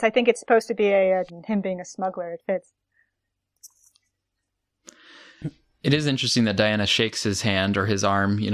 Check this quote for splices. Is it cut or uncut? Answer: cut